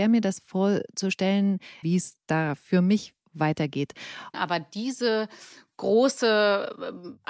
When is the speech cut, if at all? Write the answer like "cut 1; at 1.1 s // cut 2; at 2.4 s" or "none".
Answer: cut 1; at 1.8 s // cut 2; at 4.3 s